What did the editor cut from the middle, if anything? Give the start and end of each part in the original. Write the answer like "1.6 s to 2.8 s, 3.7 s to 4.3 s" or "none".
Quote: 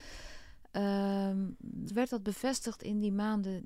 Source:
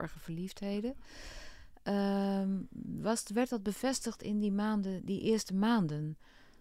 3.0 s to 3.3 s